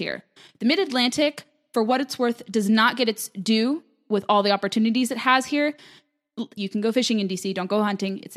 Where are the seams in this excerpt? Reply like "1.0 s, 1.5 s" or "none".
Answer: 6.6 s